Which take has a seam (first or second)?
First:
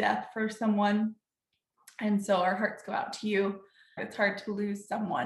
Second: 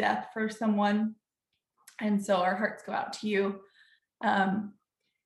first